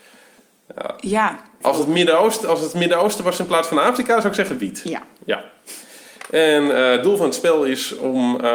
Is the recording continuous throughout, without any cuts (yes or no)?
no